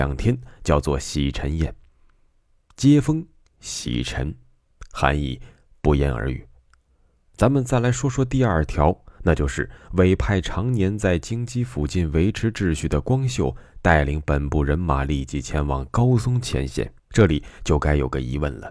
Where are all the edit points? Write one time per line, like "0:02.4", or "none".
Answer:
0:07.2
0:17.0